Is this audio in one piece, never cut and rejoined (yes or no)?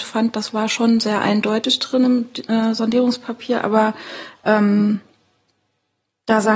yes